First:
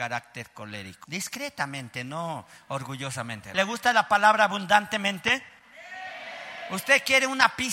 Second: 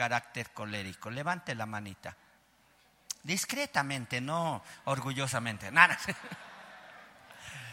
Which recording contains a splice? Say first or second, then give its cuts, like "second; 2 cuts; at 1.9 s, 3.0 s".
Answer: first; 2 cuts; at 1.0 s, 3.5 s